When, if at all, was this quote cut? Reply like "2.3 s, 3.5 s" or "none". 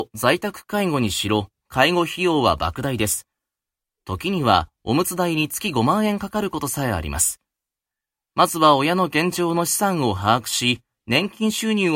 none